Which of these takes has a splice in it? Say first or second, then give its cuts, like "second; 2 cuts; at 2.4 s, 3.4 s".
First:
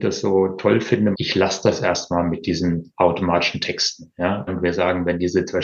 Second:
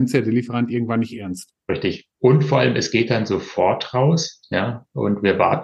first; 2 cuts; at 1.1 s, 4.5 s